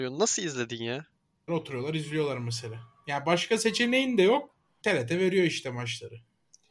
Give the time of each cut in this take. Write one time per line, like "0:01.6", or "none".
0:01.5
0:04.8